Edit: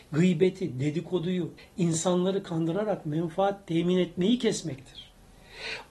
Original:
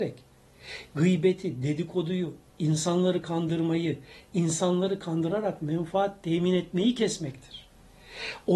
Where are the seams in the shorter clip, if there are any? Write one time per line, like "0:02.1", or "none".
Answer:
0:01.6